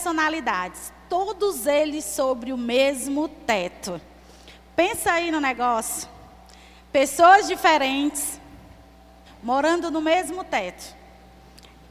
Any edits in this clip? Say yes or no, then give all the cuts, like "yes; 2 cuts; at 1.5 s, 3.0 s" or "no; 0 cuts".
yes; 1 cut; at 9.3 s